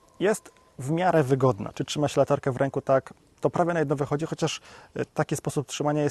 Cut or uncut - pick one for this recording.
cut